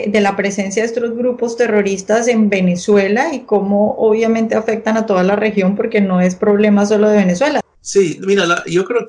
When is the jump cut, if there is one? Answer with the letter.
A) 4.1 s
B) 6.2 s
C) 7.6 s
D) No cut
C